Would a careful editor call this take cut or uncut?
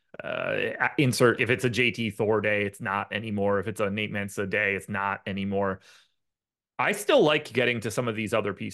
cut